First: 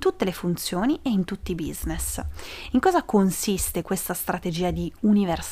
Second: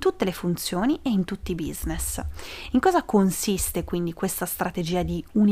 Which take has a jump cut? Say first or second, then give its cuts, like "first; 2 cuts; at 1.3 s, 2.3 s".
first; 1 cut; at 3.8 s